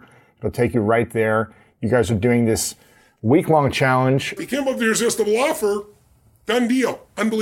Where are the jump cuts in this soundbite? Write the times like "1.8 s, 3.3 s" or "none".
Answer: 4.4 s